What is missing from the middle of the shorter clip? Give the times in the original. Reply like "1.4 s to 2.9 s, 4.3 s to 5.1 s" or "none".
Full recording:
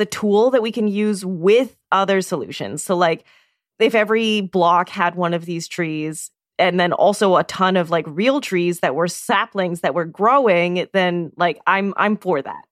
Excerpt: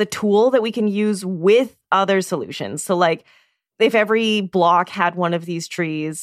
none